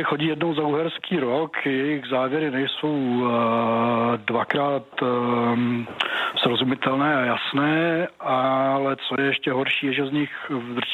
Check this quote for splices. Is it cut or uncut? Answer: uncut